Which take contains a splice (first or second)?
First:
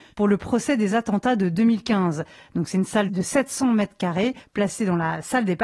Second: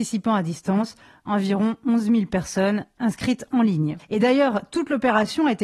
second